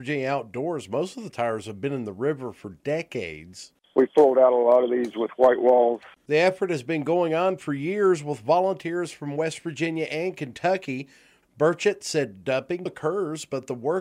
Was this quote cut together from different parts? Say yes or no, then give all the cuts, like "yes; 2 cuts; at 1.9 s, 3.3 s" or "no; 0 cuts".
yes; 1 cut; at 12.9 s